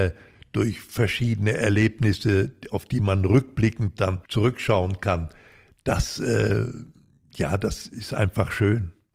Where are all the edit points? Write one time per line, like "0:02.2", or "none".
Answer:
0:04.2